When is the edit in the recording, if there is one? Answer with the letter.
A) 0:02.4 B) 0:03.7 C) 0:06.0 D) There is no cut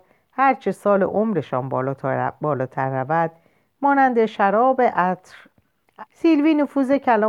C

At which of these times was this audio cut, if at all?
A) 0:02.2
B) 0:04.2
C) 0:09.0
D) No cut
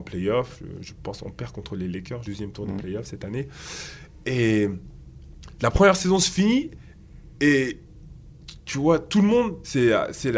A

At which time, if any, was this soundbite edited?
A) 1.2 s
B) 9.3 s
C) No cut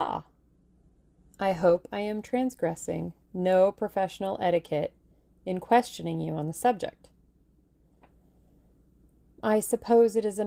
A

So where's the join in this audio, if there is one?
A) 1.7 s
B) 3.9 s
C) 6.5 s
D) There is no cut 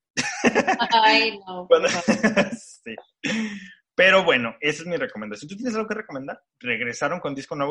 C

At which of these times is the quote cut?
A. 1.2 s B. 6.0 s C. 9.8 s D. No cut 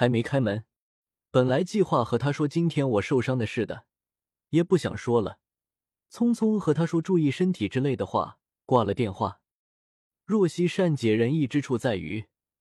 A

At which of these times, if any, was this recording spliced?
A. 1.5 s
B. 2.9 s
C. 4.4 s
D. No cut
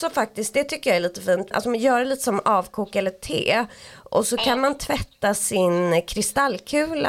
A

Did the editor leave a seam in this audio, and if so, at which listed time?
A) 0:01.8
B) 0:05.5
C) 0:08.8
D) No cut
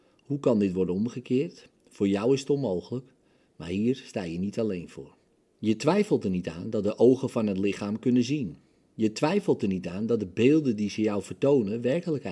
B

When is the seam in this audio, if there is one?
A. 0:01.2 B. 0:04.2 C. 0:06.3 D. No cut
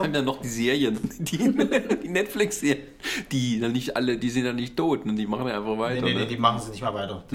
D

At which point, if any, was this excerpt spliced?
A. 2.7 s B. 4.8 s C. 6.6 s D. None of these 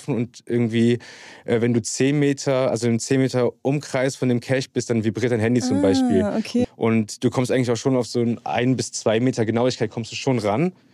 C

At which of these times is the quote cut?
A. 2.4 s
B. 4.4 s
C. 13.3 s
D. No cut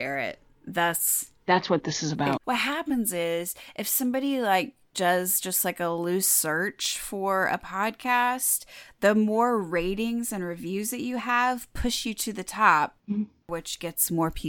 A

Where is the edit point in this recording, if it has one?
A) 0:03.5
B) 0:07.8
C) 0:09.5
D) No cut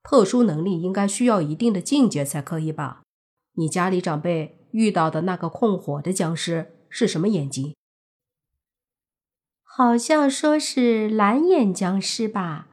D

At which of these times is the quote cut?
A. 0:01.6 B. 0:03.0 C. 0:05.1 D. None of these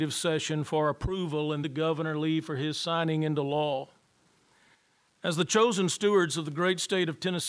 A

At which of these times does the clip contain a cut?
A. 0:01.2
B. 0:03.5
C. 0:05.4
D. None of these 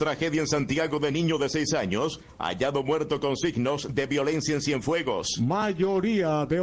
D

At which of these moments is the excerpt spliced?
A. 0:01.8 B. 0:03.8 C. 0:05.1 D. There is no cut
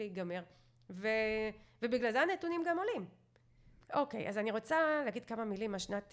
B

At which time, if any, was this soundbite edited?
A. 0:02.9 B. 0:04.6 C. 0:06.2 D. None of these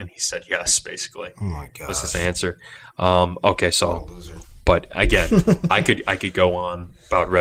D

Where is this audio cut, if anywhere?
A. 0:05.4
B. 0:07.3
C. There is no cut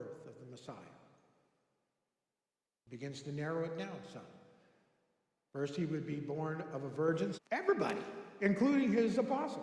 B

